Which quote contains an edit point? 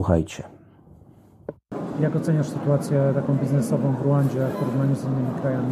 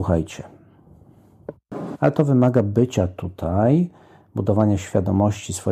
second; 1 cut; at 1.9 s

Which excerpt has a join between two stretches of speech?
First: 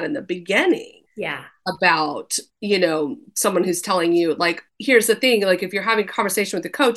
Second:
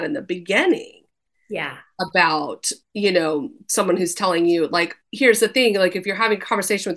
first; 1 cut; at 1.1 s

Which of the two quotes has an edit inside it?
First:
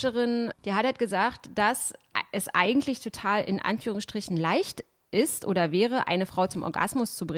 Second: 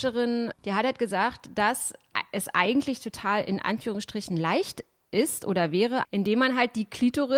second; 1 cut; at 6.0 s

